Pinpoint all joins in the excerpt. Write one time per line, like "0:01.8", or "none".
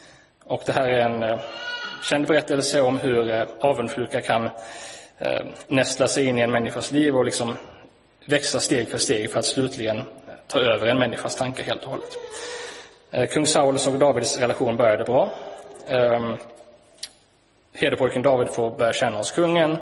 none